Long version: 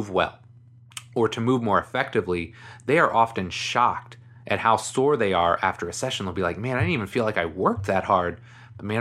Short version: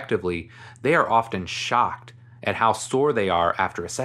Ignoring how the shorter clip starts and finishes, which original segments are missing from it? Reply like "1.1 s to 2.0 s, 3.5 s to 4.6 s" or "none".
none